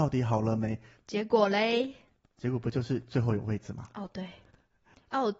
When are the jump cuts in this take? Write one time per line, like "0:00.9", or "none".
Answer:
0:01.0